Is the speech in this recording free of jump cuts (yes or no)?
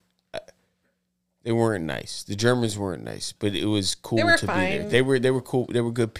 yes